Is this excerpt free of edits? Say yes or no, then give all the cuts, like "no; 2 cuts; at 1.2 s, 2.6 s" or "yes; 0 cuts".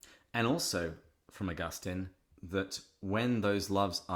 yes; 0 cuts